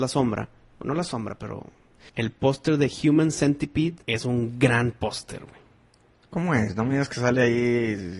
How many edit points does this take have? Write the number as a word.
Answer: two